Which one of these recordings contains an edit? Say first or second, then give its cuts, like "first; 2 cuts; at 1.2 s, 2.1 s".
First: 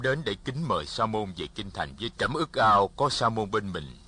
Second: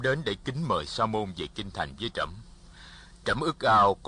first; 1 cut; at 2.1 s